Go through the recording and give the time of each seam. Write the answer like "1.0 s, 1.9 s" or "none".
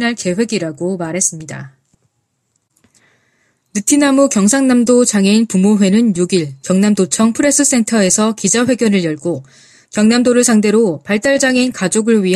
none